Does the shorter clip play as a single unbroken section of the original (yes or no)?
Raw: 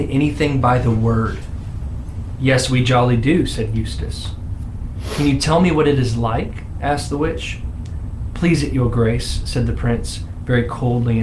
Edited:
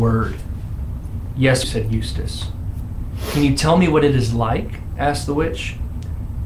no